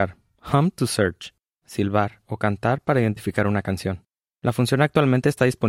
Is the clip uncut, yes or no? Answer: no